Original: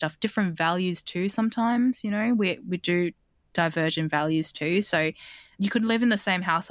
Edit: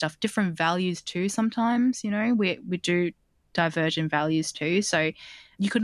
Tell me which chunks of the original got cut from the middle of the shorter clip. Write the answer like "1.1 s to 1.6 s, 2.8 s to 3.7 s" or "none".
none